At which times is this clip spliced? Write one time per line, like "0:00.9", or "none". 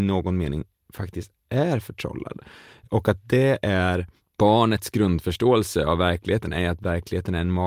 0:04.2

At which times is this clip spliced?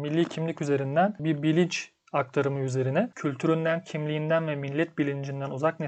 0:03.1

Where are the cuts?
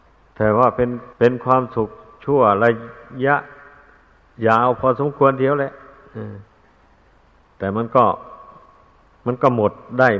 0:01.1

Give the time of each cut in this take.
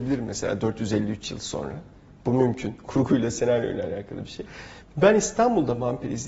0:04.8

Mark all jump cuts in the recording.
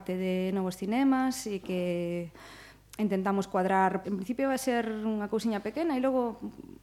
0:04.0

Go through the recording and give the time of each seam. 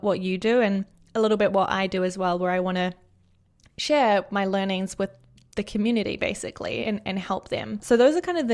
none

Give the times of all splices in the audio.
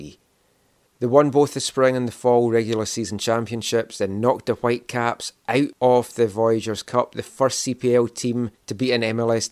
none

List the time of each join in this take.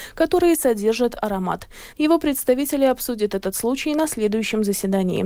0:01.9

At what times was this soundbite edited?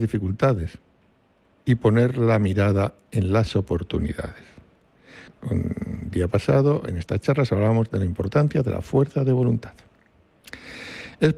0:05.3

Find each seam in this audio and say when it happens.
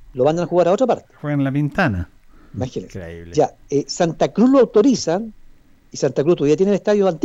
none

